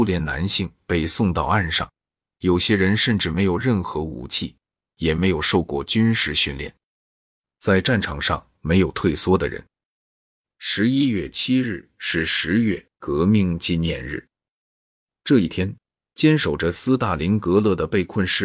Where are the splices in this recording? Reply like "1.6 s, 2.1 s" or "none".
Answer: none